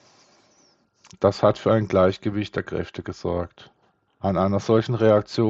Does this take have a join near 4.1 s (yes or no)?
yes